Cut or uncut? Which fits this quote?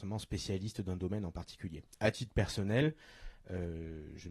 uncut